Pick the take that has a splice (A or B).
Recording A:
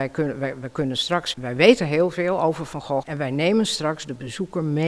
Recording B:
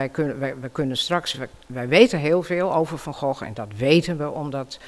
A